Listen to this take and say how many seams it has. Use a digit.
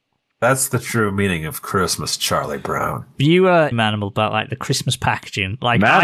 1